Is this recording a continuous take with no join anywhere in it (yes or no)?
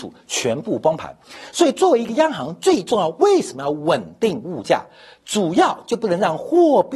yes